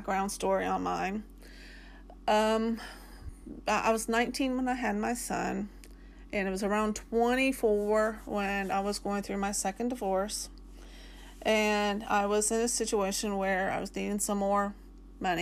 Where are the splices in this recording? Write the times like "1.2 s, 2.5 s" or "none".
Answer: none

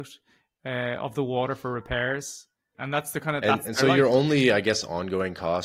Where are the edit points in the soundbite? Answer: 2.7 s

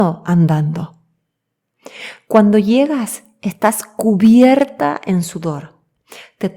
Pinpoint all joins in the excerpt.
none

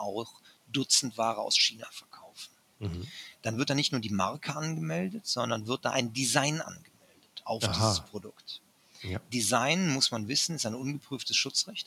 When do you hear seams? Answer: none

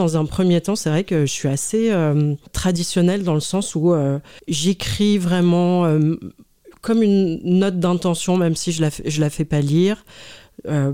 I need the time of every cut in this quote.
none

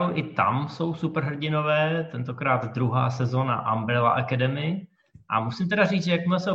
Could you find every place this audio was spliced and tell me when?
none

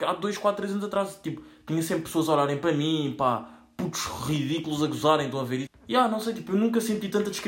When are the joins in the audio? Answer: 5.7 s

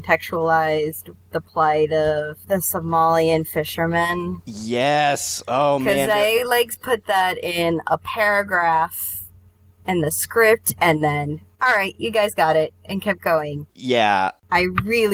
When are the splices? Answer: none

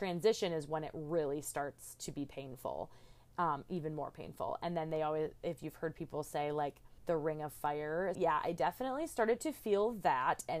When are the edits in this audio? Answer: 7.0 s, 8.1 s

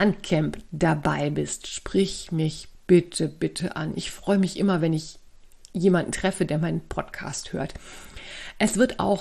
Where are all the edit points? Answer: none

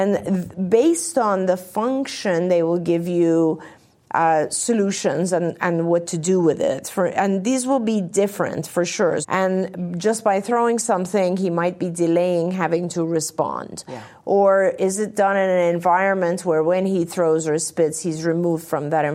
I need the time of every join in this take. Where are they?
9.2 s

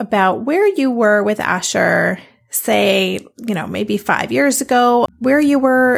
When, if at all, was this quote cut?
5.1 s

